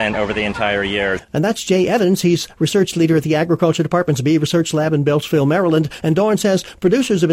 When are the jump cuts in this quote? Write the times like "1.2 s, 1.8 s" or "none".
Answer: 6.0 s